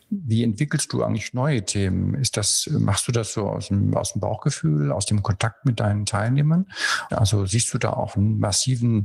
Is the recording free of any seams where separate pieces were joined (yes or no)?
no